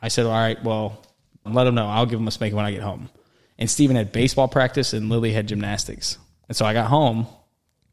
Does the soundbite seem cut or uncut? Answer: cut